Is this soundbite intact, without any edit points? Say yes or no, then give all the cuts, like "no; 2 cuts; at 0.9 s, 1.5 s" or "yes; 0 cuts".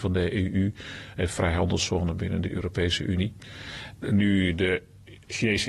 yes; 0 cuts